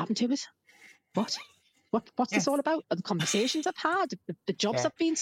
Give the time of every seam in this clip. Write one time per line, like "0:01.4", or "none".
0:02.8